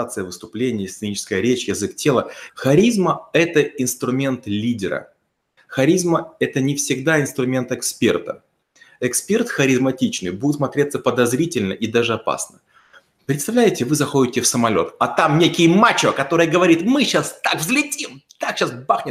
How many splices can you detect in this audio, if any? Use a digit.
1